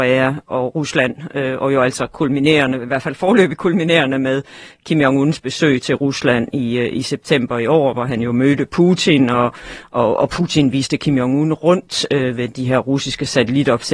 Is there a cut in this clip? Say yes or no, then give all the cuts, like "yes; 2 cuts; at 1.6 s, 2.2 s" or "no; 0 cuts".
no; 0 cuts